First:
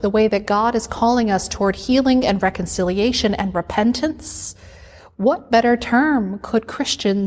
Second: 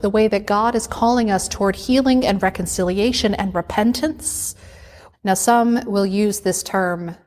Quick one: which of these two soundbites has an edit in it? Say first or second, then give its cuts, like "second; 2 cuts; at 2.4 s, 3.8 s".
second; 1 cut; at 5.1 s